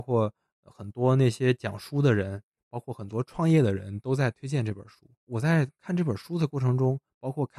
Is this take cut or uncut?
uncut